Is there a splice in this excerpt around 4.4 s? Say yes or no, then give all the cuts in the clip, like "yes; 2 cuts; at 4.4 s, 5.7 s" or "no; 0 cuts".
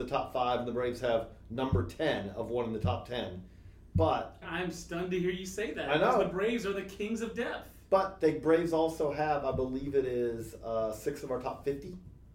yes; 1 cut; at 4.4 s